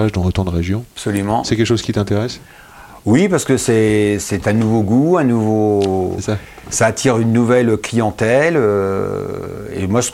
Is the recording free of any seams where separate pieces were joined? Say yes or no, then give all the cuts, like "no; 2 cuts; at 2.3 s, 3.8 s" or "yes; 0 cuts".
yes; 0 cuts